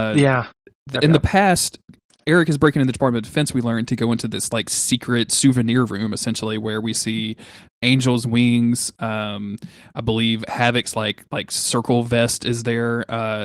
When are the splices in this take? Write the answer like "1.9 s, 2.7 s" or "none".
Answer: none